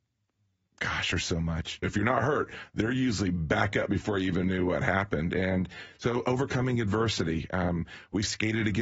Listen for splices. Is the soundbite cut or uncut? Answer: cut